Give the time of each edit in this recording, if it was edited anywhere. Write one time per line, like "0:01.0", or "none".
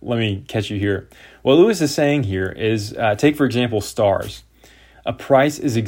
0:04.9